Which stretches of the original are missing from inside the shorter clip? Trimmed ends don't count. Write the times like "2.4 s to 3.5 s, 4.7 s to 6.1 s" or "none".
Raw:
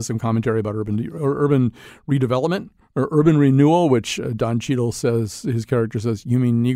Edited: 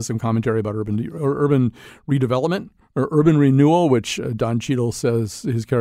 none